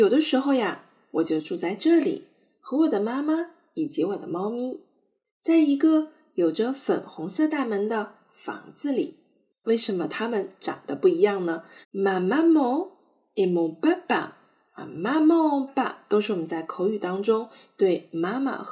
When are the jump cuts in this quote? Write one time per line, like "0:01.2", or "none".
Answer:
0:09.6
0:11.8
0:15.7

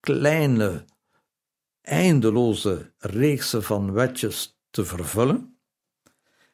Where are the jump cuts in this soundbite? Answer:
none

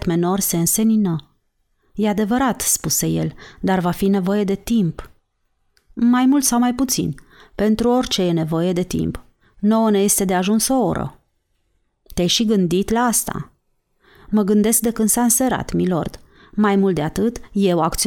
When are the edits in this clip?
none

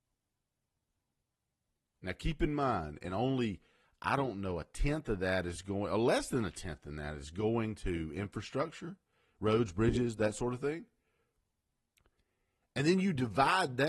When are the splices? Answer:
none

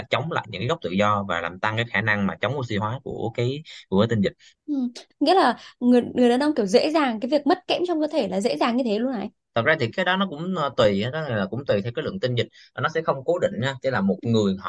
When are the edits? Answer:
0:05.1
0:09.9

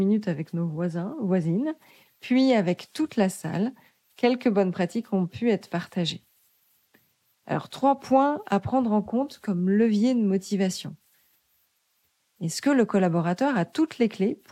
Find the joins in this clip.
0:12.2

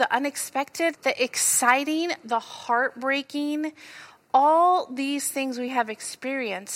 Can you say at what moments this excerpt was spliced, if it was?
0:00.9

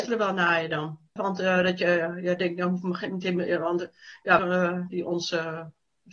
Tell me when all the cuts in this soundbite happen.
0:01.2
0:04.4

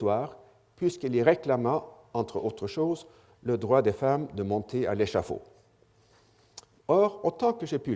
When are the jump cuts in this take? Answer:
0:06.8

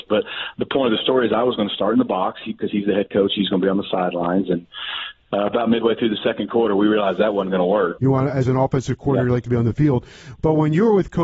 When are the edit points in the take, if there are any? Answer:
0:08.0

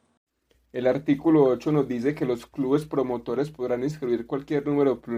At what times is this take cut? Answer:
none

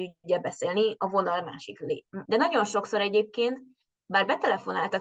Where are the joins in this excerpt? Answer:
0:02.2

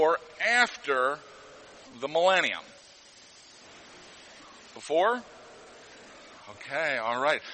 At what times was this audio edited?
0:06.3

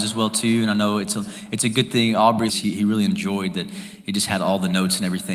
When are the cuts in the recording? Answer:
0:02.5

